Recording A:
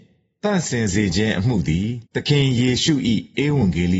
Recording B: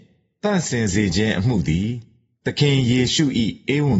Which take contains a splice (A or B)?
A